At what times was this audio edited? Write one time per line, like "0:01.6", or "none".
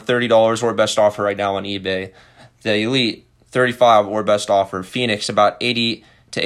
none